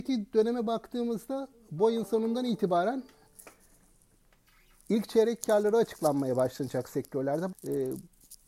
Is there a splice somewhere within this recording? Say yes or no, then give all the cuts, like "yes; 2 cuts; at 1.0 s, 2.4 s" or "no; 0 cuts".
yes; 1 cut; at 7.5 s